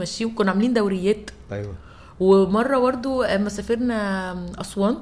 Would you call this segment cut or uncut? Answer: cut